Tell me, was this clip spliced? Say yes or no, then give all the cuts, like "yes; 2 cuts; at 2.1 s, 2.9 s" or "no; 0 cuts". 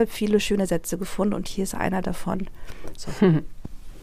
yes; 1 cut; at 2.9 s